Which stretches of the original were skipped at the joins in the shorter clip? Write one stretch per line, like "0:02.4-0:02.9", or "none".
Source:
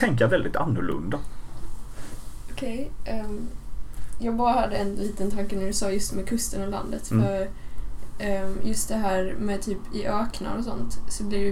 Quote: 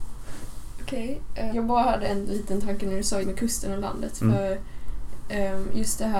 0:03.2-0:04.2
0:05.9-0:06.1

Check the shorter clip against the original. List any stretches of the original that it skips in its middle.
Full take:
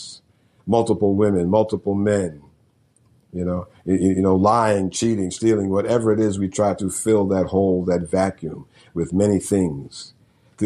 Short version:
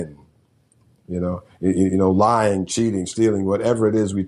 none

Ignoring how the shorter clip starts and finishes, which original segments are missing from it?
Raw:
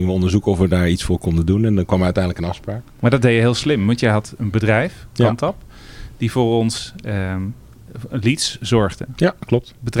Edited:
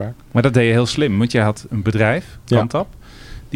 none

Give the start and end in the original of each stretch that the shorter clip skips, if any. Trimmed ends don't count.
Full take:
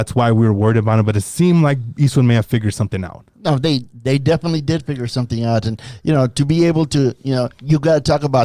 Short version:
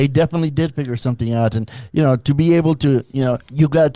none

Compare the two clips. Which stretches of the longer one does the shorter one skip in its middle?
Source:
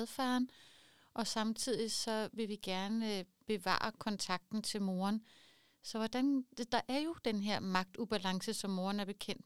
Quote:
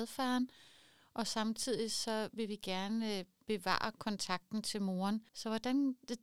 0:05.3-0:05.8

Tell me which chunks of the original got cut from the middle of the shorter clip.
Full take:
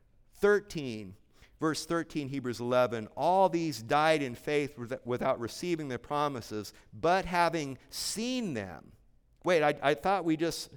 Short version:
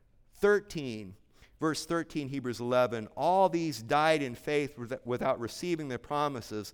none

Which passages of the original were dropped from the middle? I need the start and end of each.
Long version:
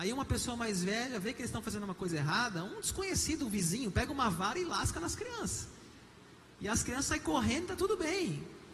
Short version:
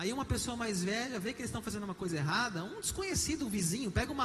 none

